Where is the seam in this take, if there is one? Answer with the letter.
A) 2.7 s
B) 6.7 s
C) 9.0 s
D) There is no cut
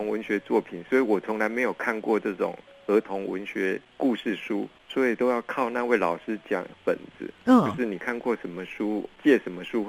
B